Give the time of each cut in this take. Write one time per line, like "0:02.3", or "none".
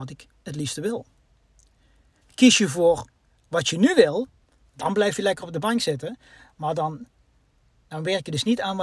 none